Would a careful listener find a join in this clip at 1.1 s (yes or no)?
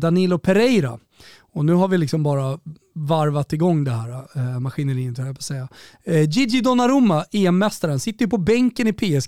no